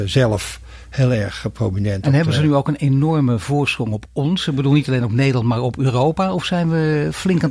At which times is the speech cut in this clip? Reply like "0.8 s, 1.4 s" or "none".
none